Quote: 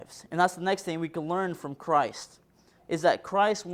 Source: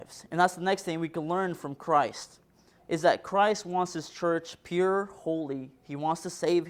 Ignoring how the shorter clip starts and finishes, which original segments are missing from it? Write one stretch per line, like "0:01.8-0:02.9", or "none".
none